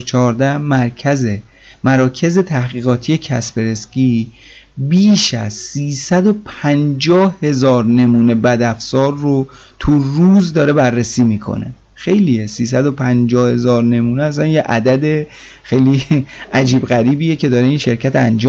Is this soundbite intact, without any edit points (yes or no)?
yes